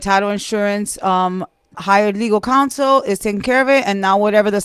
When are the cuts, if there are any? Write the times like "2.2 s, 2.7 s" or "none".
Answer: 1.7 s